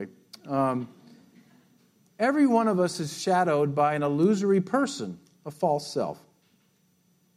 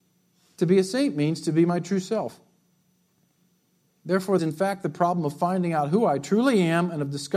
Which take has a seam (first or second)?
second